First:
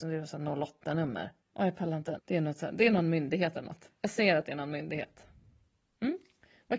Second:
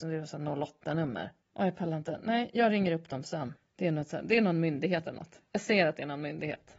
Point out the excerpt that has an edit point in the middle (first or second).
first